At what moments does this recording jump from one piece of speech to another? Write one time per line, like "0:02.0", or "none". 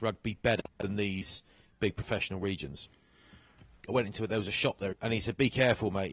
0:03.9
0:04.9

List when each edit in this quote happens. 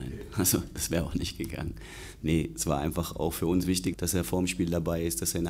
0:03.9

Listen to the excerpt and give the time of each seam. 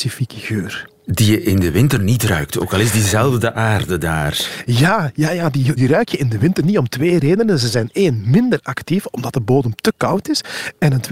0:05.8

